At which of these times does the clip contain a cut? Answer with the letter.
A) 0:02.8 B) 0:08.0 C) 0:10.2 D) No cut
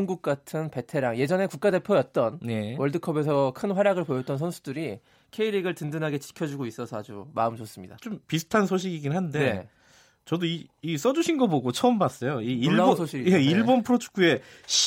B